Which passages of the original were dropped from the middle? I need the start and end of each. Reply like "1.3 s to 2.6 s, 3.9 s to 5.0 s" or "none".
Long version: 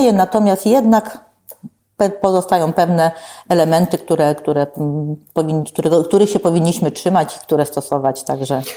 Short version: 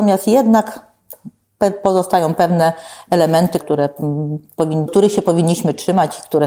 4.0 s to 4.4 s, 5.7 s to 6.1 s